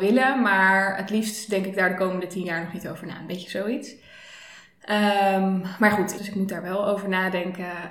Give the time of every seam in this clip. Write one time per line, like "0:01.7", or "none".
0:06.2

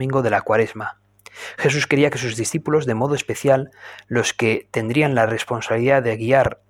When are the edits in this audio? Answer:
none

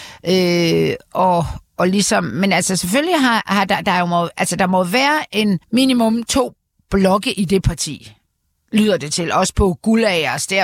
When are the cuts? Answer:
0:05.6

